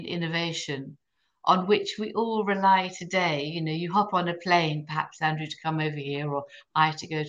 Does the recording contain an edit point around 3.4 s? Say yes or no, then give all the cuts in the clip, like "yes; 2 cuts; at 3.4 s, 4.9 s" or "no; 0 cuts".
no; 0 cuts